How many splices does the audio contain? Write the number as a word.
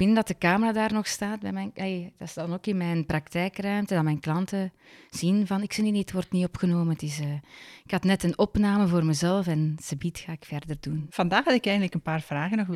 one